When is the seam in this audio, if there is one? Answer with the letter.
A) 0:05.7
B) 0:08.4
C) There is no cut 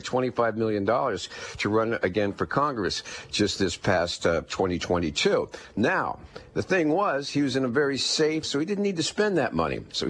B